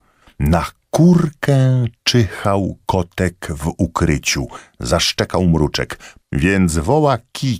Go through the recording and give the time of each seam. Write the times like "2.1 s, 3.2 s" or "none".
6.2 s